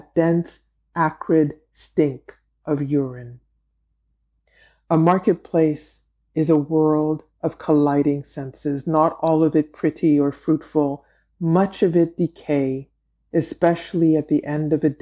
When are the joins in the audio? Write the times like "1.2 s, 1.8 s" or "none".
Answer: none